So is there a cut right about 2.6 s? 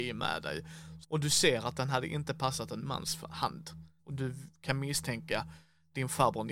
no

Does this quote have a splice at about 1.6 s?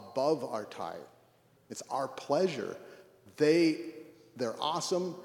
yes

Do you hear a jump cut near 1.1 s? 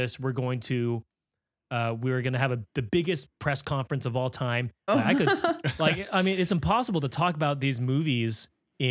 no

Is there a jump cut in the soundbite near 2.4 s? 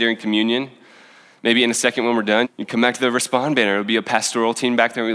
yes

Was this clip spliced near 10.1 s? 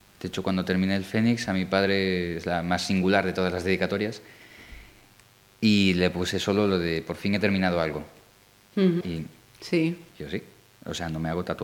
yes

